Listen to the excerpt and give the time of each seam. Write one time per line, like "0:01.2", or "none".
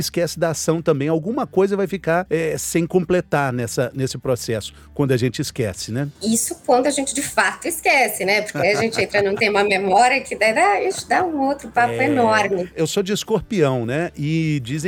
none